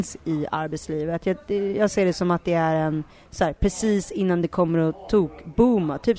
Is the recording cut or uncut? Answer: uncut